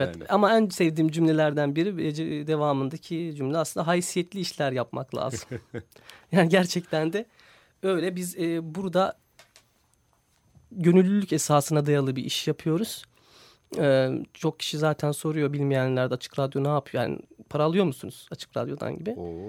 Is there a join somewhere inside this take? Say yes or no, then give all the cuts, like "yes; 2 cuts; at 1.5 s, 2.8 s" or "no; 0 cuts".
no; 0 cuts